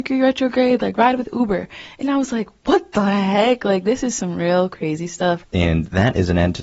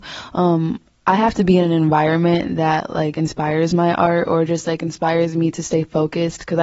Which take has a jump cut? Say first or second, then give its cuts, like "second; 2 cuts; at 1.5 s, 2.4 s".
first; 1 cut; at 5.4 s